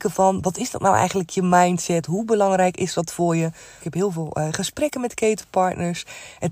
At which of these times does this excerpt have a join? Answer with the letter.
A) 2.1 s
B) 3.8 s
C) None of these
B